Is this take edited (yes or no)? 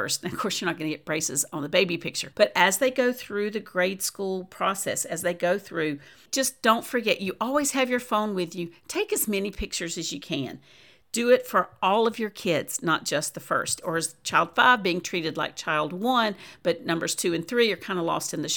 yes